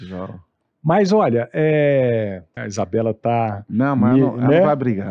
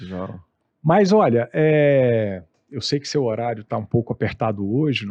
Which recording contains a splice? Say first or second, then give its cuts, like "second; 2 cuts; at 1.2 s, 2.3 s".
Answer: first; 1 cut; at 2.6 s